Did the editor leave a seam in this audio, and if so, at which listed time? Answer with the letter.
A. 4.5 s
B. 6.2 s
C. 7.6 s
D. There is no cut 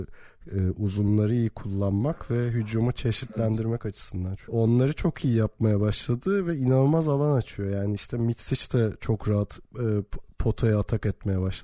A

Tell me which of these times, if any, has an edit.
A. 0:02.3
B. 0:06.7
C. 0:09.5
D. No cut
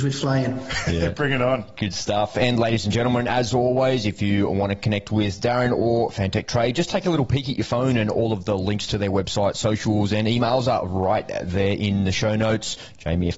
A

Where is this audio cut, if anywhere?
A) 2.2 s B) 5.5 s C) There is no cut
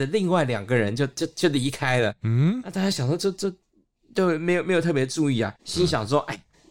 B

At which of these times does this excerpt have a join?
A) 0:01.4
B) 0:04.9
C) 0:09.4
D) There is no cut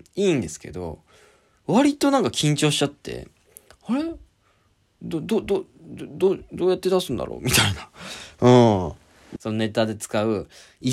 C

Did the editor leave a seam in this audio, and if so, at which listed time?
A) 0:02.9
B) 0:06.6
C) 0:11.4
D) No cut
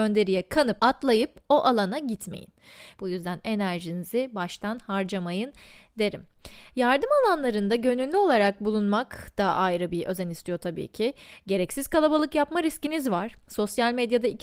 A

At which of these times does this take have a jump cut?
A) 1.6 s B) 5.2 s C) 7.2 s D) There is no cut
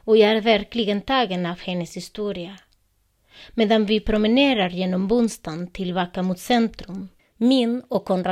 C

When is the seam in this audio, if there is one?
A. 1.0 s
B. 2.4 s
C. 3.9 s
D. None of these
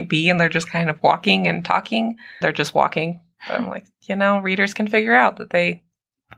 B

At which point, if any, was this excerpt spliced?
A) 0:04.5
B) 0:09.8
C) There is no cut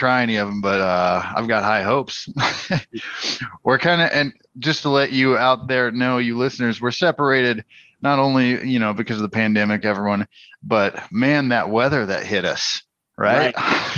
B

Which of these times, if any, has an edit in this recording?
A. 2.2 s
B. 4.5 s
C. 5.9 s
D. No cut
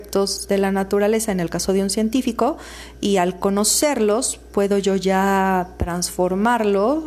D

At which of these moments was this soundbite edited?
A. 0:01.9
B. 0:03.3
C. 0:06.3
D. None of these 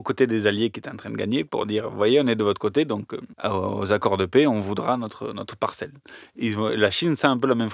B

